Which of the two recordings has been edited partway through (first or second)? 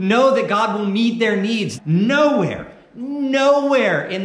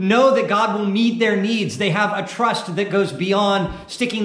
first